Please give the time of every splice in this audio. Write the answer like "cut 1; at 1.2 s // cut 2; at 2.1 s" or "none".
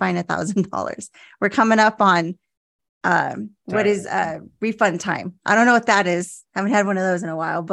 cut 1; at 3.6 s